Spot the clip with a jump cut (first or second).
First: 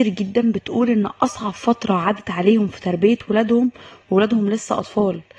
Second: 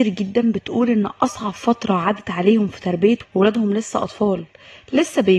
second